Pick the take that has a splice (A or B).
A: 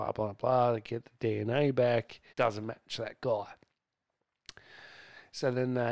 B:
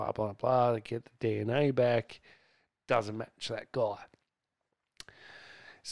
A